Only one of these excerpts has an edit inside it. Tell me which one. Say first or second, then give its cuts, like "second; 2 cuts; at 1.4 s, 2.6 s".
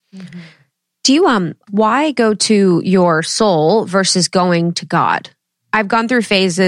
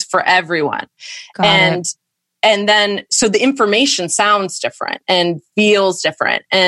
first; 1 cut; at 1.7 s